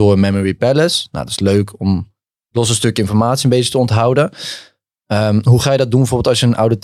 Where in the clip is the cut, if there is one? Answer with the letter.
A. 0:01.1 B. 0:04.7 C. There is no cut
C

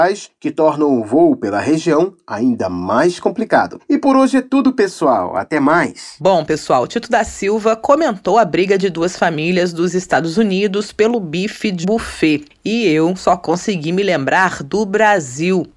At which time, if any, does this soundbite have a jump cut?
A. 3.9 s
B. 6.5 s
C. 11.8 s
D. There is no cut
C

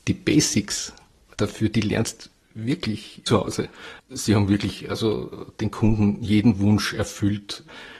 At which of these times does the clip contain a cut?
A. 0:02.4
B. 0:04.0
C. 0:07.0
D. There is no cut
B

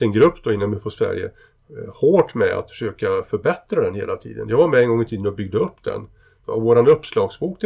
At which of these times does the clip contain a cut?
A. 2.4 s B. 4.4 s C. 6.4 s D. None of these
C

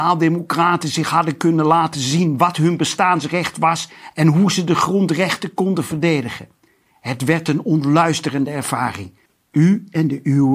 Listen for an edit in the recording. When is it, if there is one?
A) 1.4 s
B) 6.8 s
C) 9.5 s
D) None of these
D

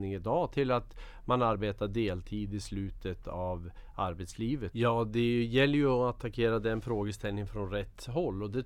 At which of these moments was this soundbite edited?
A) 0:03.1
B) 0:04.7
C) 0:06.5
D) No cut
B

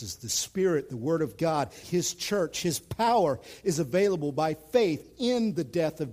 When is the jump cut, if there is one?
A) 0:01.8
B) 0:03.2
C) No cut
A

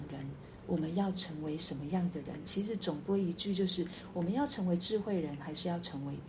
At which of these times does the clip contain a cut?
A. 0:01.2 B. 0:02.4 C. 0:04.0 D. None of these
D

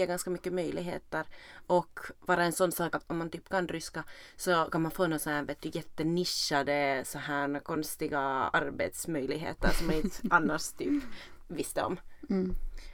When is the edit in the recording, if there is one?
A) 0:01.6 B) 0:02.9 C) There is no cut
B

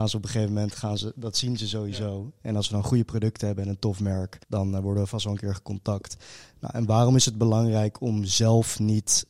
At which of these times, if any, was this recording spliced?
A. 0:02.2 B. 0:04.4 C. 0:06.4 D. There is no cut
B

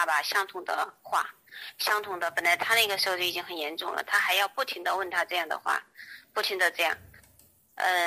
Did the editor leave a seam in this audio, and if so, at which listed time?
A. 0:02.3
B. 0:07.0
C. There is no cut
C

